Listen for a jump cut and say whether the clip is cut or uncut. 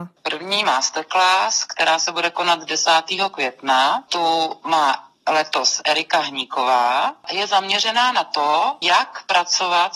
uncut